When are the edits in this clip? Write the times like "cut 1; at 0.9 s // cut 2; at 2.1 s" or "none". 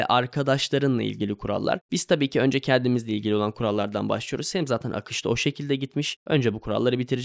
none

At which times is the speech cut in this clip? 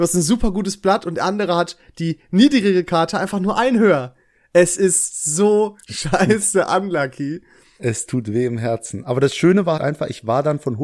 cut 1; at 9.8 s

